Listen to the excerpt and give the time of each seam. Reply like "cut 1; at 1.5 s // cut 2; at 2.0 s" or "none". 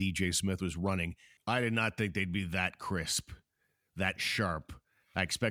cut 1; at 1.4 s